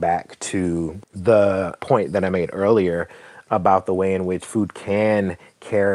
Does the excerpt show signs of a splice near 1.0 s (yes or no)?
yes